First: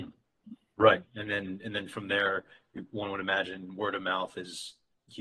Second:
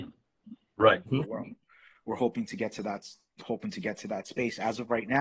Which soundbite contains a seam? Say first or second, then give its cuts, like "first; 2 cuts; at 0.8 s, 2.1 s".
second; 1 cut; at 1.1 s